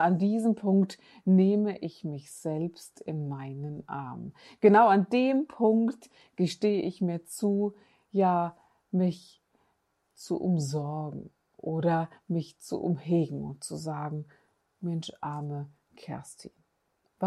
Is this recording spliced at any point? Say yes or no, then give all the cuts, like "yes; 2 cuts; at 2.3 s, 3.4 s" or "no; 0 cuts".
no; 0 cuts